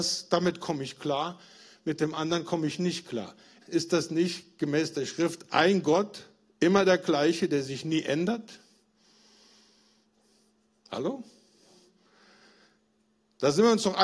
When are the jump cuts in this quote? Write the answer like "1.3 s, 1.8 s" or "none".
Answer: 3.6 s